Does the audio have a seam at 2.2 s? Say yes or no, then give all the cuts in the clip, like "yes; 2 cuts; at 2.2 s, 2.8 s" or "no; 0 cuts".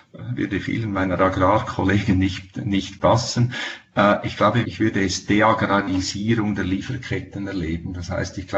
no; 1 cut; at 4.6 s